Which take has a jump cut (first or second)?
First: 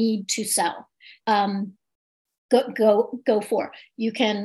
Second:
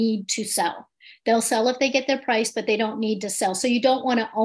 first